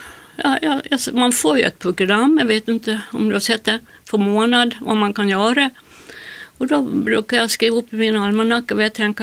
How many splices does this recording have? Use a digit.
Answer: 0